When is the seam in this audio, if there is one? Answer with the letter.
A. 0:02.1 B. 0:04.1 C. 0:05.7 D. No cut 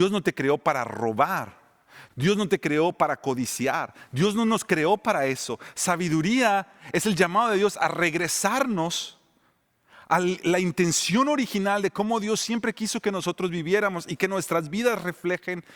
A